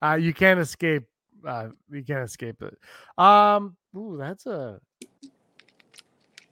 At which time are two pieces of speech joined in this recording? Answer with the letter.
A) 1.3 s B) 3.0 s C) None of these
C